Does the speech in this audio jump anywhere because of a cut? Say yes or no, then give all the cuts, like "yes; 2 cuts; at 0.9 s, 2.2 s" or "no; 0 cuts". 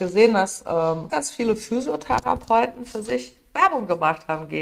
yes; 1 cut; at 1.1 s